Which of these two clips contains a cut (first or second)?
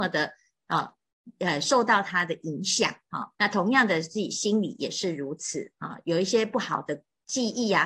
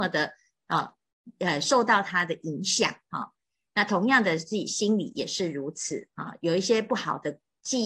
first